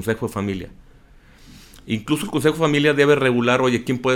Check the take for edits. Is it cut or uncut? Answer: uncut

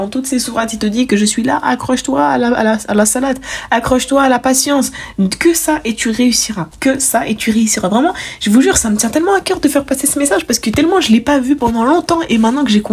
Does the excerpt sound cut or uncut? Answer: cut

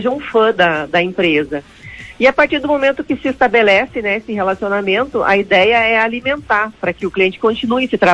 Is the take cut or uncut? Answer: uncut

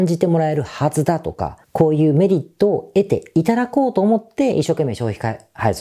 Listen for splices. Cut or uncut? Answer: cut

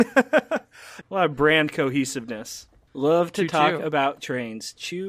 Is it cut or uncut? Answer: cut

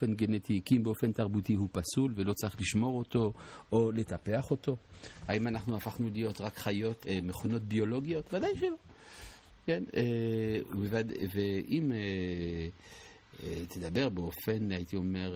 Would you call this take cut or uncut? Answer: cut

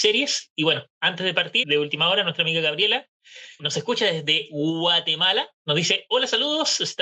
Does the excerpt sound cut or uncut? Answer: cut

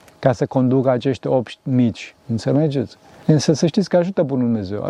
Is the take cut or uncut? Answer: cut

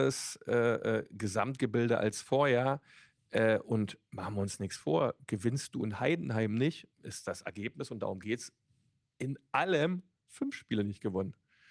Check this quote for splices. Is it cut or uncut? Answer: cut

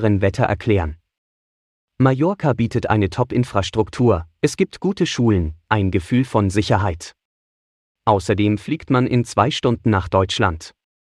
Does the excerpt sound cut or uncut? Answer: uncut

